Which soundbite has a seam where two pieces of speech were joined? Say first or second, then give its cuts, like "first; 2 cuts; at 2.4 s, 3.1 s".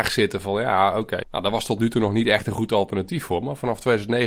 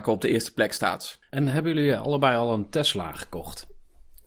first; 1 cut; at 1.2 s